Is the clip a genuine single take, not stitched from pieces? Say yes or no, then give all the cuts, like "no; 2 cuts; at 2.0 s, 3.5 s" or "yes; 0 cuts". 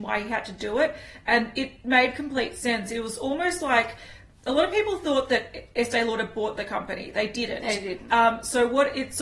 yes; 0 cuts